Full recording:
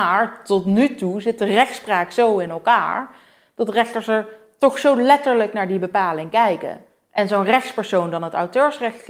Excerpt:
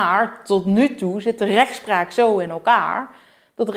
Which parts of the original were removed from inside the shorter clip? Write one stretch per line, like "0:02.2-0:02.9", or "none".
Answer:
none